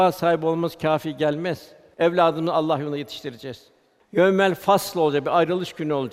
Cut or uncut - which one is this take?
cut